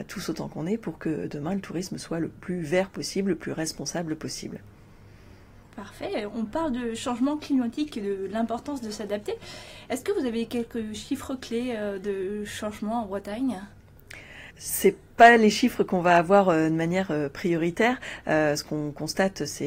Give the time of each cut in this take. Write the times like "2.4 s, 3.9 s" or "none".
14.5 s